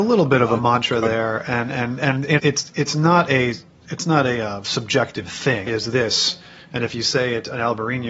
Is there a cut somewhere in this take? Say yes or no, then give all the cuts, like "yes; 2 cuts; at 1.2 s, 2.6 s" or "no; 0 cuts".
yes; 2 cuts; at 2.4 s, 5.7 s